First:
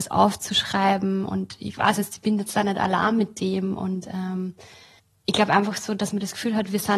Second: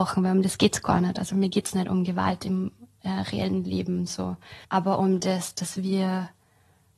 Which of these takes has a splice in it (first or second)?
second